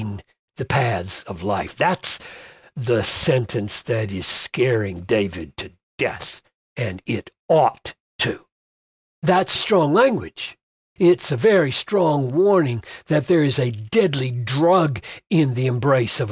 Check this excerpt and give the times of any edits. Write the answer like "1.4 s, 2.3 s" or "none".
9.5 s, 11.0 s